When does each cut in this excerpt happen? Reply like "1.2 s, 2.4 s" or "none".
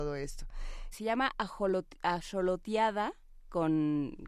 0.9 s